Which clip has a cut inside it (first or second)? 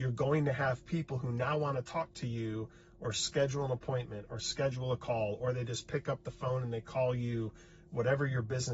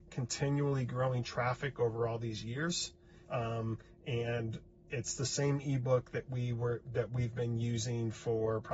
second